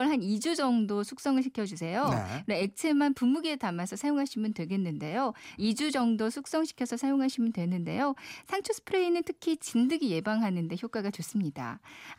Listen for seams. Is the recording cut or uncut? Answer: cut